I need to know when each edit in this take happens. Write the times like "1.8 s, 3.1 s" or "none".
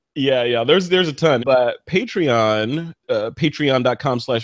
1.4 s, 2.9 s